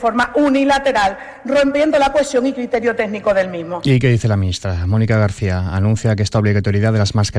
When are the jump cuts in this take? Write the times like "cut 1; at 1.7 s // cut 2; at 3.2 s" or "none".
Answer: none